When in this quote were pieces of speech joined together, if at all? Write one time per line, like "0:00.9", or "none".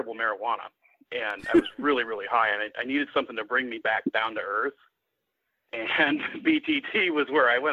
none